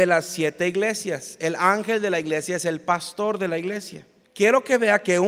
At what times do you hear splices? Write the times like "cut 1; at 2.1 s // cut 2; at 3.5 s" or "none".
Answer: cut 1; at 4.2 s